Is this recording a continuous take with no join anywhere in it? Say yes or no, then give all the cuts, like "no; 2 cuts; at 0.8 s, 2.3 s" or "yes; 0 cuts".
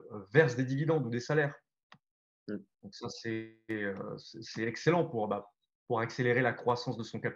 yes; 0 cuts